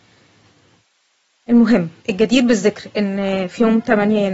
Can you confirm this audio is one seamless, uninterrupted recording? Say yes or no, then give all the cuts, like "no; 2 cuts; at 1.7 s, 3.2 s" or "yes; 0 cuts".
no; 1 cut; at 2.0 s